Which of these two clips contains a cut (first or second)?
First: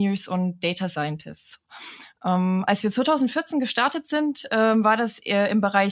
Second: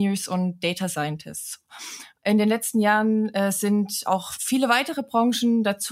second